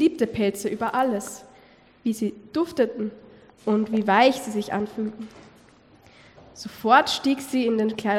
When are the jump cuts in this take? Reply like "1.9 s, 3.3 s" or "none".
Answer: none